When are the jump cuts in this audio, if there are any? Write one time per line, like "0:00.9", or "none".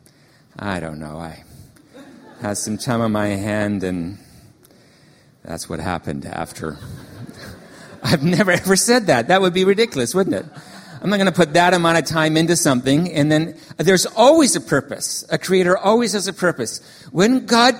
none